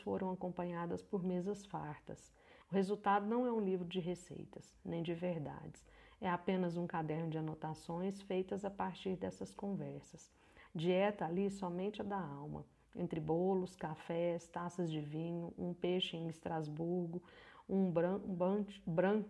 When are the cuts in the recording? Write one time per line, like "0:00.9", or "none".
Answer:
0:02.6
0:10.7